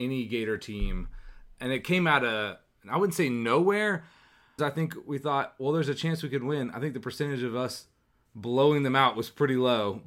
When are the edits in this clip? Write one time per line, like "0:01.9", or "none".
0:04.6